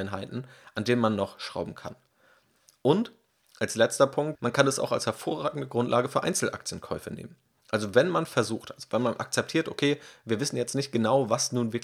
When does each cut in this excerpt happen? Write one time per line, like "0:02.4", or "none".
0:04.3